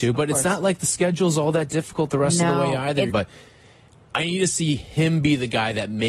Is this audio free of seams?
no; 1 cut; at 3.1 s

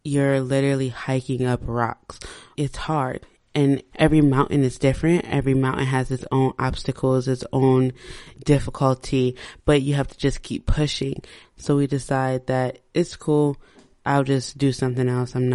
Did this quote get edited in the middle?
yes; 1 cut; at 11.4 s

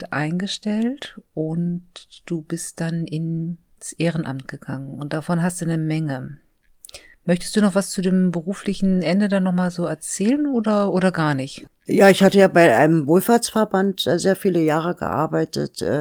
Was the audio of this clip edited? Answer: no; 0 cuts

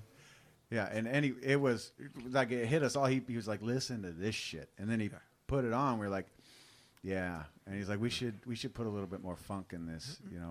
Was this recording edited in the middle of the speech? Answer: no; 0 cuts

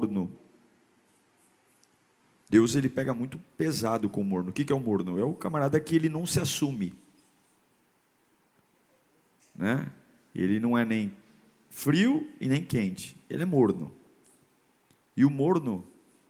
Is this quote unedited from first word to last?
yes; 0 cuts

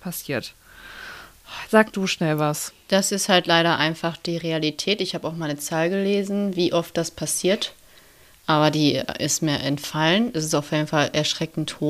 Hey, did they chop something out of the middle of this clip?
yes; 1 cut; at 1.7 s

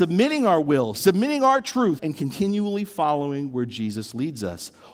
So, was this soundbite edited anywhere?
yes; 2 cuts; at 0.9 s, 2.0 s

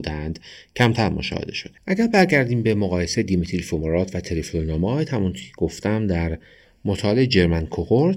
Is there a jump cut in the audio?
yes; 1 cut; at 1.8 s

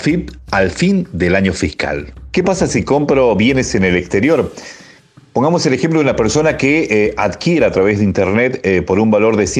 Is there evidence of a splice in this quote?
no; 0 cuts

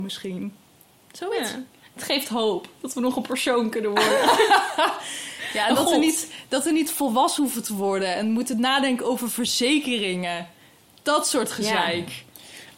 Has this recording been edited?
no; 0 cuts

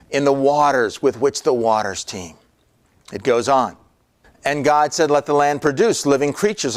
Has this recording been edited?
no; 0 cuts

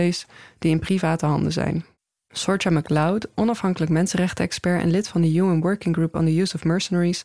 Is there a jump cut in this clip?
yes; 1 cut; at 2.2 s

